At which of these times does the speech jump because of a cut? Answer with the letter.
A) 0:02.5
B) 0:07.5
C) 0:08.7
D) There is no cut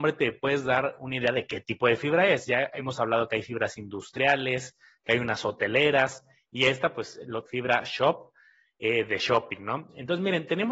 B